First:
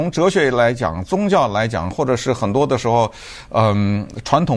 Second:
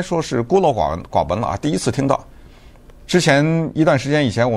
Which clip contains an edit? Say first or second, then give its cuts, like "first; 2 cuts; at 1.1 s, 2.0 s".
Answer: second; 1 cut; at 3.0 s